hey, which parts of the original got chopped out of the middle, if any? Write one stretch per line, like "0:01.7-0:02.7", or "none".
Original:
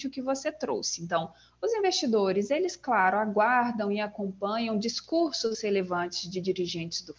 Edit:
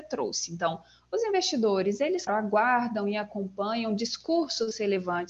0:02.8-0:03.1